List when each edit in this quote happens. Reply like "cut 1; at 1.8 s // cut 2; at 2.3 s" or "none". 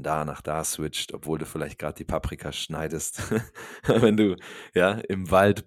none